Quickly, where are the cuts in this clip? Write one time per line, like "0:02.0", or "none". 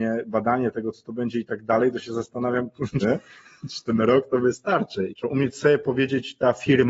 0:03.0
0:05.1

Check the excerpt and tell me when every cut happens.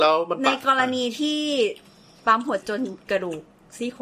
0:02.6

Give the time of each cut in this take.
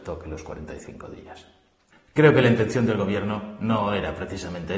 none

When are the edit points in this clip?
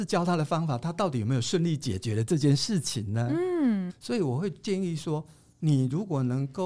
0:03.9

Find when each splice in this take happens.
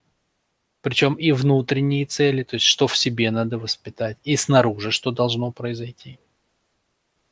none

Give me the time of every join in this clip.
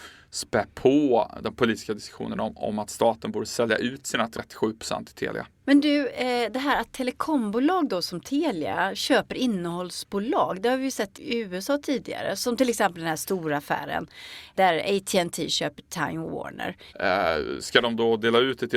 0:05.6
0:16.9

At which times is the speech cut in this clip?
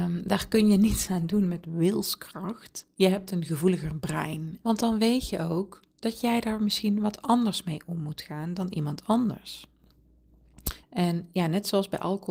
0:04.6
0:10.8

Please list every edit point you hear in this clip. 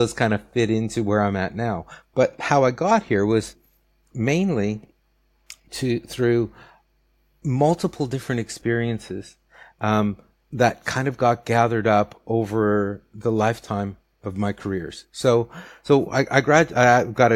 none

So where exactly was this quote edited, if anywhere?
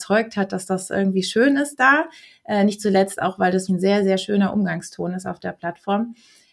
0:03.7

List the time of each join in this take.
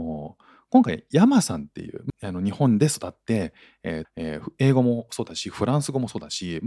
0:02.1
0:04.0

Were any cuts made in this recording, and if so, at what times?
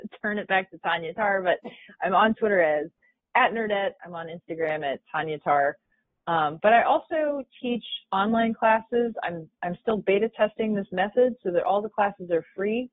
none

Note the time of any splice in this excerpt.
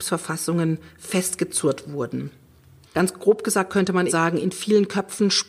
0:02.8
0:04.1

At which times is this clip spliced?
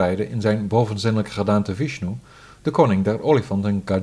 none

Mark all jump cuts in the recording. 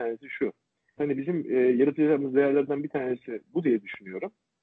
0:01.0

